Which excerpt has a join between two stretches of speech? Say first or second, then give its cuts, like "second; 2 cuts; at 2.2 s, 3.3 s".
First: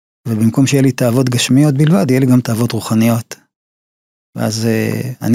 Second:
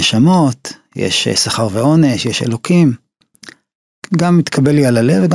second; 1 cut; at 4.0 s